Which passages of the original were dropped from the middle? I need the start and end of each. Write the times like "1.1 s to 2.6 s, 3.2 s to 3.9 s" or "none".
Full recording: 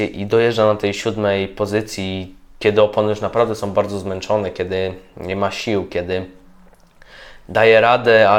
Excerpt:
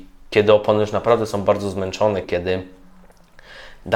4.5 s to 5.9 s